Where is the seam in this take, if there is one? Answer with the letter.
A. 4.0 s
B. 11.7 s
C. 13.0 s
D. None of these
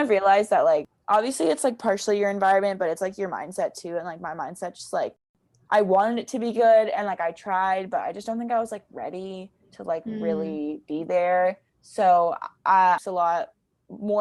C